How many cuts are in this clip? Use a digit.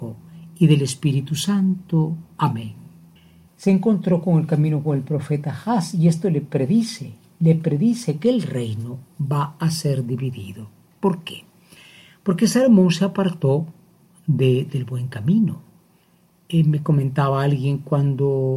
1